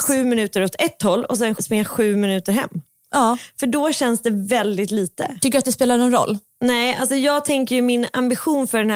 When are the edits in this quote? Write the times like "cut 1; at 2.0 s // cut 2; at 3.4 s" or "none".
cut 1; at 1.6 s // cut 2; at 5.4 s